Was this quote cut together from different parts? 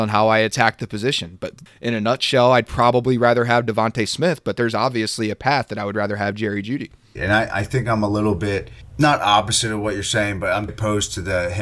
yes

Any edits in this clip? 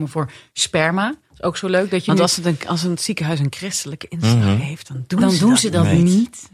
no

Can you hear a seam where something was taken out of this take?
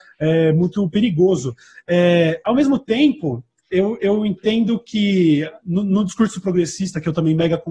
no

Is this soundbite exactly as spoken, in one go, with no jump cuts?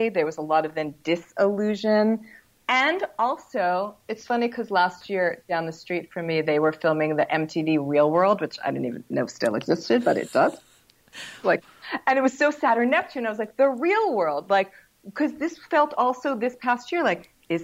yes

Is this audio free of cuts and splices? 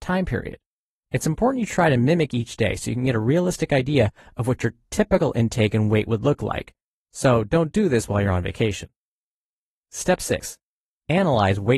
no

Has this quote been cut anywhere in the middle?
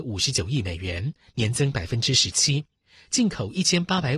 no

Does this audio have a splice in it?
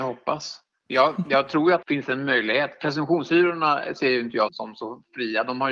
yes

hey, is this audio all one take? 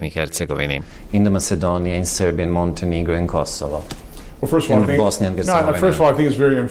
yes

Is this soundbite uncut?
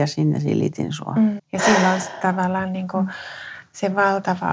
no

